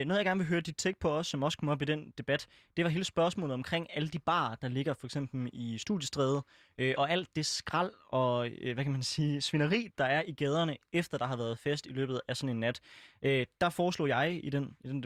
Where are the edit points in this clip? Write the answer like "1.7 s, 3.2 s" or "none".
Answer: none